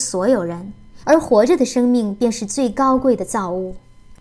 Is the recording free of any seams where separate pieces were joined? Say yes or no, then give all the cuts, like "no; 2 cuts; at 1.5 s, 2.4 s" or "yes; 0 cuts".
no; 1 cut; at 1.0 s